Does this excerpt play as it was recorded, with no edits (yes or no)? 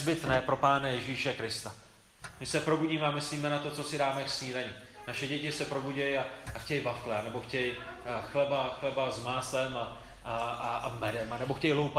yes